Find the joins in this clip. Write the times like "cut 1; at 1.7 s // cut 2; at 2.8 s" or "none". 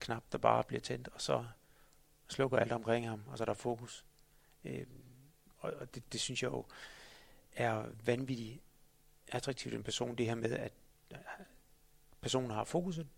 cut 1; at 5.9 s

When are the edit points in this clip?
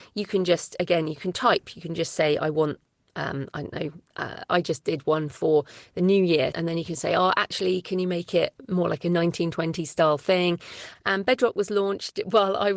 cut 1; at 6.5 s // cut 2; at 10.9 s

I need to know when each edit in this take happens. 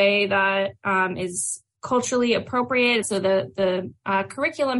cut 1; at 3.0 s

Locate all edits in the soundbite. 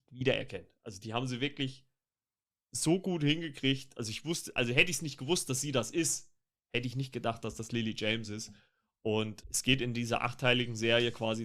cut 1; at 9.4 s

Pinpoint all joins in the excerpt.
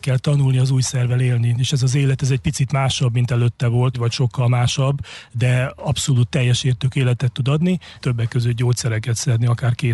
cut 1; at 3.9 s // cut 2; at 8.0 s

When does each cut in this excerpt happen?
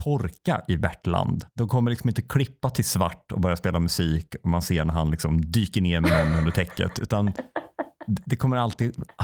cut 1; at 1.5 s

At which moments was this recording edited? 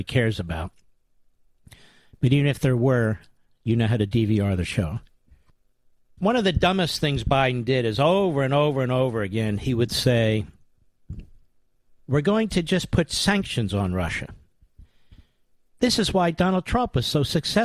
cut 1; at 15.7 s

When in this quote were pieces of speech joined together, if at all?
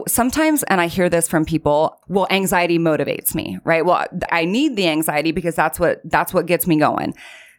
cut 1; at 2.0 s // cut 2; at 4.3 s

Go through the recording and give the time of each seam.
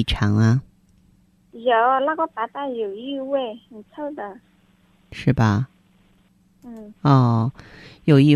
none

